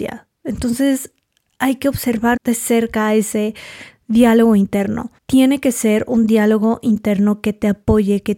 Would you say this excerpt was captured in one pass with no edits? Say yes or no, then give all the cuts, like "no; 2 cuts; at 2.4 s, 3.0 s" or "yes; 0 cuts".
no; 2 cuts; at 2.4 s, 5.2 s